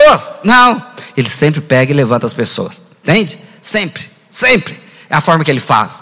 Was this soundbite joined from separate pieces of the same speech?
no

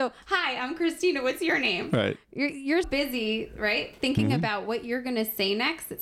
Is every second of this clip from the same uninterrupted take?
no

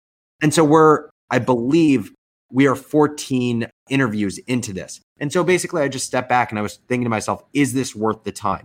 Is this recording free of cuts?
yes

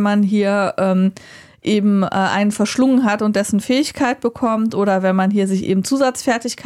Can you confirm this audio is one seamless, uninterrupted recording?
yes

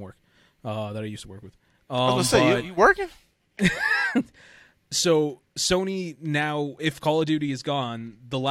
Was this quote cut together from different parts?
no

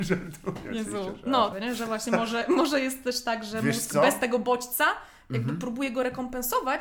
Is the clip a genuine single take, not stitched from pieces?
no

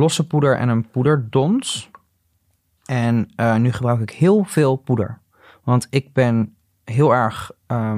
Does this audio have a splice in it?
no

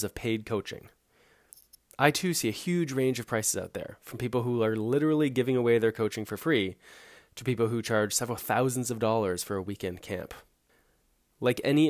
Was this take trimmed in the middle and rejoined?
no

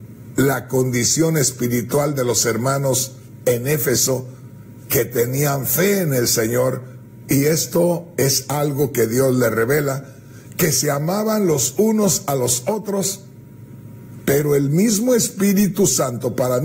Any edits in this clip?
no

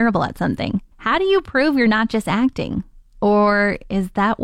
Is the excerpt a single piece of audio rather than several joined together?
no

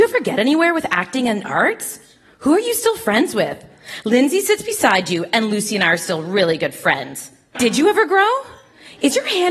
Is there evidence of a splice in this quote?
yes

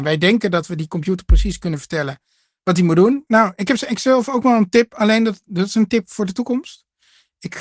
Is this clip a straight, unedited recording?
no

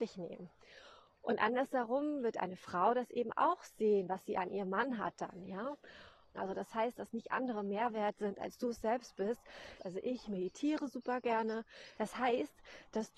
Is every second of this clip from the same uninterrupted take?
no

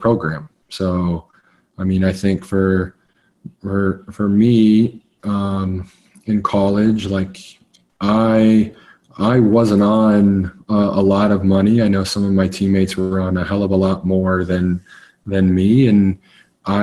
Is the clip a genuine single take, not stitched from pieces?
yes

